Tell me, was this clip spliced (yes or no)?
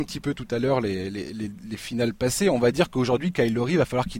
no